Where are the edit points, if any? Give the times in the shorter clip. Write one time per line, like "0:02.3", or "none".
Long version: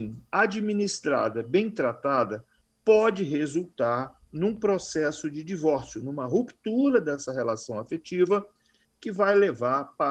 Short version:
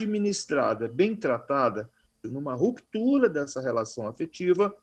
0:02.2